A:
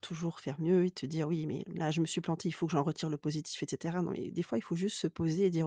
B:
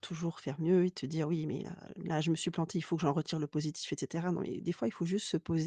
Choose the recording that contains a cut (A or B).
A